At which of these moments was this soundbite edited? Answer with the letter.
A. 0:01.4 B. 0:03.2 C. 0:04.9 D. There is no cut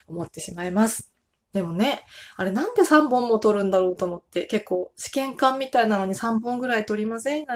A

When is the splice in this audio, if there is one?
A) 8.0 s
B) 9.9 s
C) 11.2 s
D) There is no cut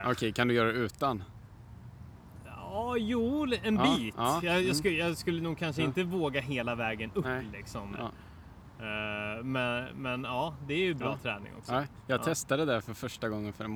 A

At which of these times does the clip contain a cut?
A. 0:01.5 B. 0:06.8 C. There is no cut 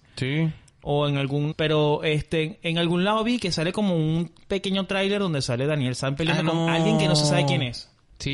A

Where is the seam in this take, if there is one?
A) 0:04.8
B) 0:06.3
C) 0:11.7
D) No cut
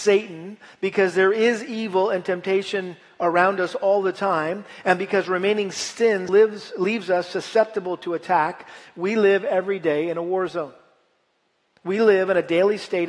B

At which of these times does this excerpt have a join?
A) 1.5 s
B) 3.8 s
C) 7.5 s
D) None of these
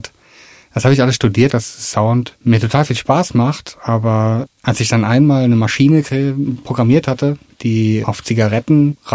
A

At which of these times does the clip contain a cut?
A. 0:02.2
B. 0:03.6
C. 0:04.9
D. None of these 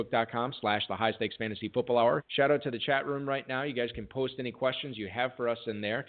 A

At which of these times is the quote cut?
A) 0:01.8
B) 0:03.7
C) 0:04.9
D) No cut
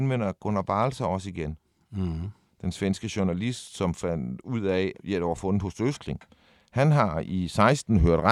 C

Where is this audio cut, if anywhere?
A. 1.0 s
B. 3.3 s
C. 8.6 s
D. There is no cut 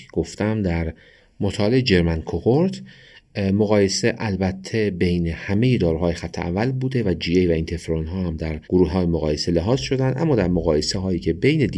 C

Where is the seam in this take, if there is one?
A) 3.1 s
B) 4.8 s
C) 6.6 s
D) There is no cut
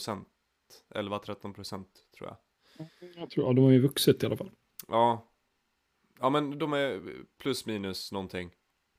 C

